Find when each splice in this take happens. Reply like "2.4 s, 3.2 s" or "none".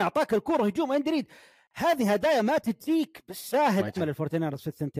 4.0 s